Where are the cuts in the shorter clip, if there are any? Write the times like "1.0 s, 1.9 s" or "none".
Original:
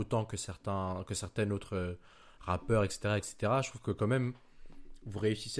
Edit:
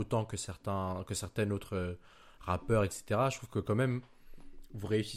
2.9 s